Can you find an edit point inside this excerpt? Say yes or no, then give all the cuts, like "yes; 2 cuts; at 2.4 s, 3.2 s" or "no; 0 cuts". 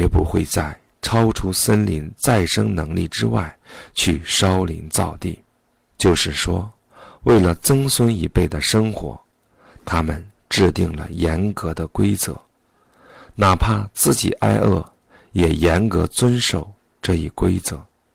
yes; 1 cut; at 5.9 s